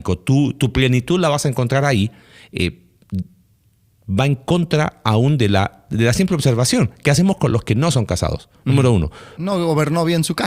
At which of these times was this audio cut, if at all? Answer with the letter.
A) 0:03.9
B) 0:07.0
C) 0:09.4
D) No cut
C